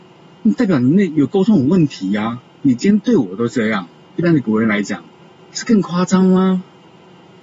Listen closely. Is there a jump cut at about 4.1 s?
yes; 2 cuts; at 2.6 s, 4.1 s

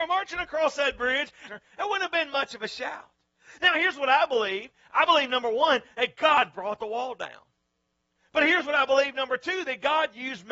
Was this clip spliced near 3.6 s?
no; 1 cut; at 1.5 s

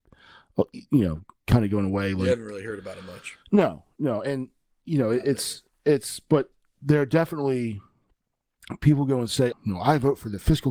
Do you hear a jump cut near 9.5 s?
yes; 1 cut; at 9.5 s

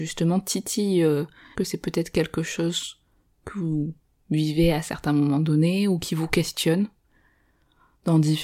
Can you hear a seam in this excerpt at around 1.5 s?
yes; 1 cut; at 1.5 s

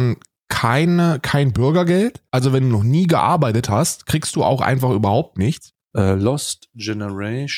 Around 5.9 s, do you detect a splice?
yes; 2 cuts; at 2.3 s, 5.9 s

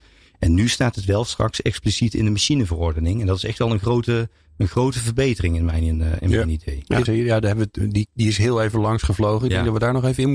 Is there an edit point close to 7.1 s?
yes; 1 cut; at 7.1 s

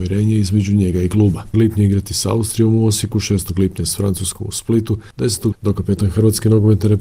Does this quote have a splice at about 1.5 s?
yes; 2 cuts; at 1.5 s, 5.5 s

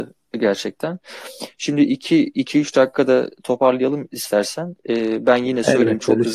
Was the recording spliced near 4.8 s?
no; 0 cuts

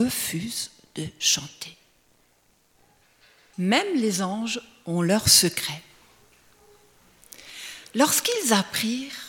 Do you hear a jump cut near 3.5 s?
yes; 1 cut; at 3.5 s

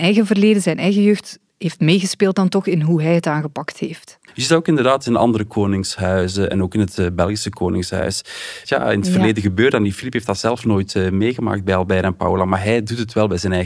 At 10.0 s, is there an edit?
no; 2 cuts; at 4.3 s, 8.6 s

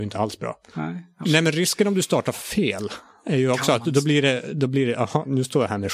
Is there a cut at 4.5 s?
no; 1 cut; at 1.2 s

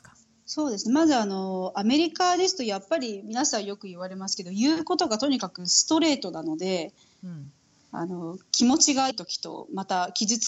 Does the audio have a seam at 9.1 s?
yes; 1 cut; at 9.1 s

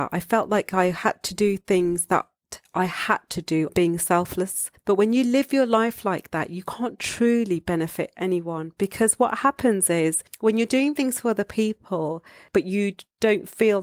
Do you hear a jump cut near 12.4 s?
no; 1 cut; at 3.7 s

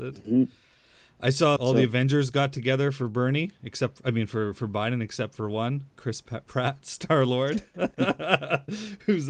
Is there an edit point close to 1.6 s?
yes; 1 cut; at 1.6 s

